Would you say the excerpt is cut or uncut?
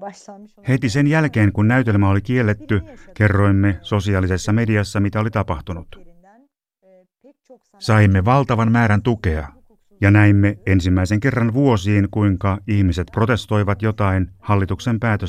uncut